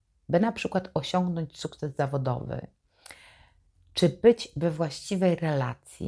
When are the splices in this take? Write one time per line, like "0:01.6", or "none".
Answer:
none

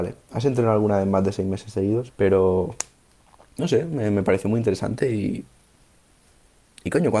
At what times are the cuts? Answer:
0:02.1

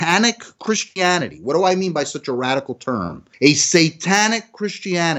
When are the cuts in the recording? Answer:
none

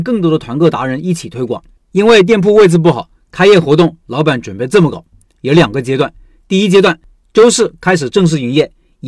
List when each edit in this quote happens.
0:01.8

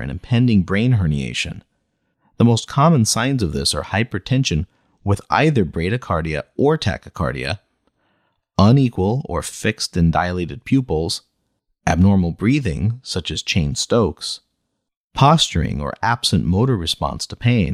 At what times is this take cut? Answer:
none

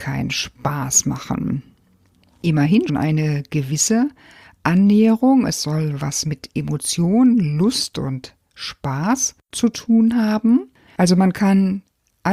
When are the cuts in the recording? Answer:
0:02.9
0:09.4
0:10.9

